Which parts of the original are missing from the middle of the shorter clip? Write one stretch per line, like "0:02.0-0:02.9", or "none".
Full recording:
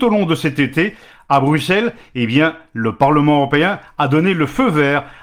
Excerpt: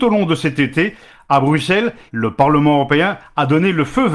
0:02.1-0:02.7